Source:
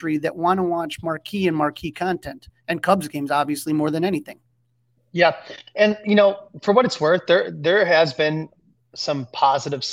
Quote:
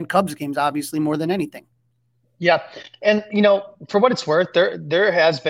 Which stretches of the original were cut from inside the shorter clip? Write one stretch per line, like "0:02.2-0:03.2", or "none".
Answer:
none